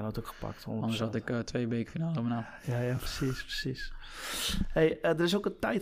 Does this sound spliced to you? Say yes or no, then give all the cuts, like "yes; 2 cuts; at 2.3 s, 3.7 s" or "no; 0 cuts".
no; 0 cuts